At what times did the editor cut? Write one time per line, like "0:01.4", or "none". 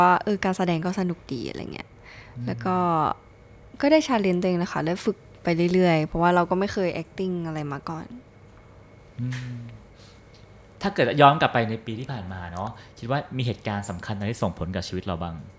none

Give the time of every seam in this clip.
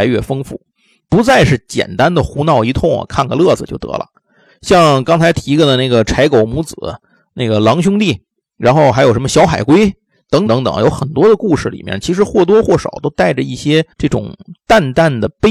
0:10.5
0:13.9

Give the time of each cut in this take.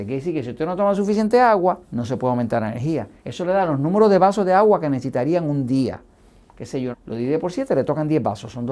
0:01.8
0:03.2
0:06.9

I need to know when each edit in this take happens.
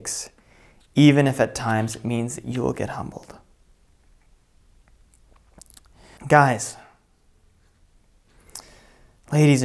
0:06.2

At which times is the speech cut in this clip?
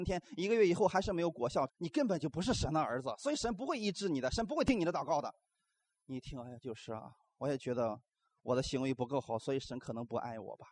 0:01.7

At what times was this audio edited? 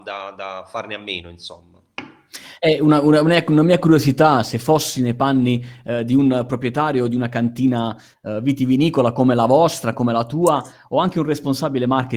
none

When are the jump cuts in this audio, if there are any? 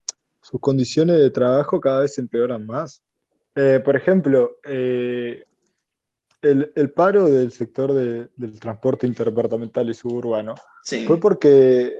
none

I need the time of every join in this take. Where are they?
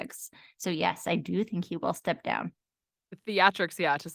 none

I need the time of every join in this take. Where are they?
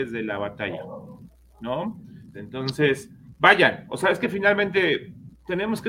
0:02.3
0:03.4

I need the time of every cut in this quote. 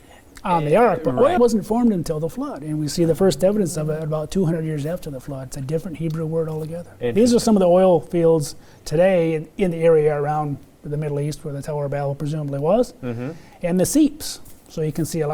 0:01.4

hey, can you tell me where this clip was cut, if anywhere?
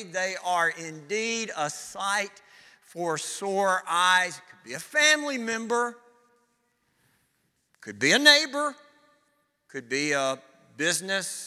none

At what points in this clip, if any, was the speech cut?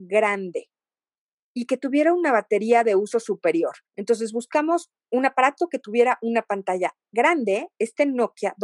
0:03.9
0:05.0

